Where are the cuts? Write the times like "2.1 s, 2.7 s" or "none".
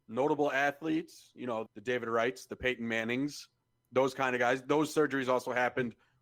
1.7 s

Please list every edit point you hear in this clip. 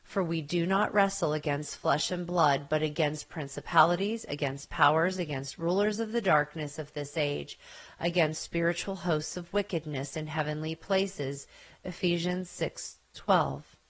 none

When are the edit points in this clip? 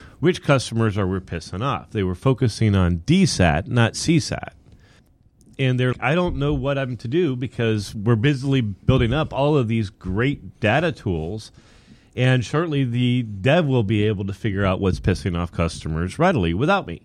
5.9 s

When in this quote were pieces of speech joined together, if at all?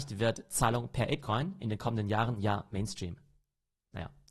none

